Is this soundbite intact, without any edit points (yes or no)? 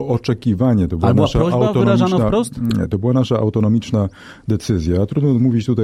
yes